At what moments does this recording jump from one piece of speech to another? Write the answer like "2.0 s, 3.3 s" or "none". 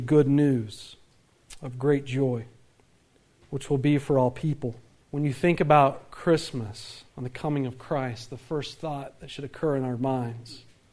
5.0 s, 7.1 s